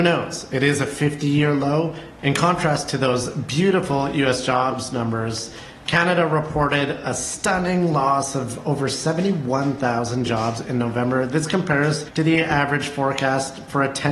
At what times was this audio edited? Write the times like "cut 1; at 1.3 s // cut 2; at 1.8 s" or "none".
cut 1; at 2.2 s